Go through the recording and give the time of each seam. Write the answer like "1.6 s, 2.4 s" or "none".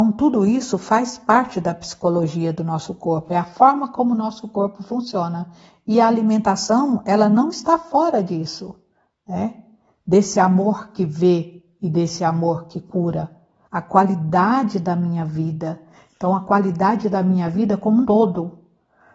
13.6 s, 18.0 s